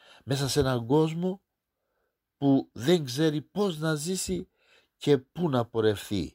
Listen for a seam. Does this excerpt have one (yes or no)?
no